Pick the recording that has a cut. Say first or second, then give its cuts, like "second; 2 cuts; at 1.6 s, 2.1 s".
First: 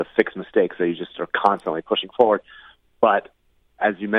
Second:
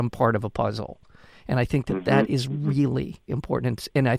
second; 1 cut; at 3.3 s